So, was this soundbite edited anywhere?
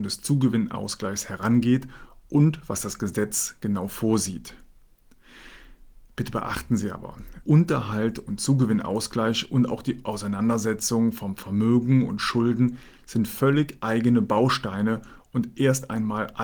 yes; 1 cut; at 7.4 s

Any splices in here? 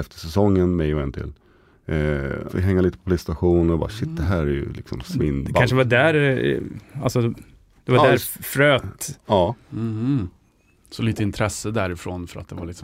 yes; 1 cut; at 2.5 s

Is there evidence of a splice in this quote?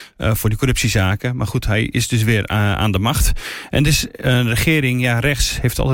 no; 0 cuts

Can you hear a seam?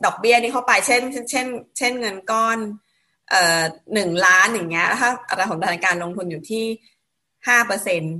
no; 0 cuts

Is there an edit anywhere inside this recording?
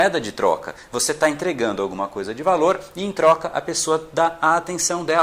no; 0 cuts

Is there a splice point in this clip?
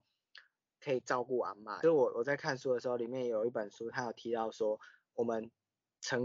no; 0 cuts

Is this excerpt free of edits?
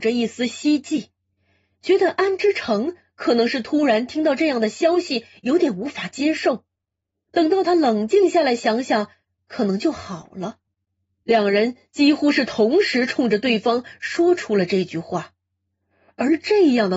no; 1 cut; at 11.2 s

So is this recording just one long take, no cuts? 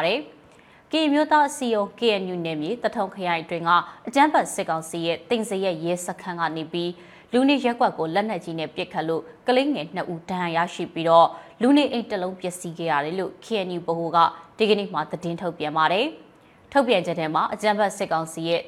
yes; 0 cuts

